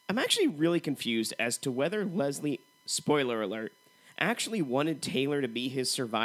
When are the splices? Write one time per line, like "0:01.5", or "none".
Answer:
none